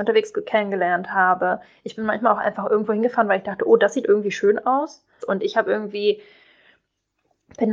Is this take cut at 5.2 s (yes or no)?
yes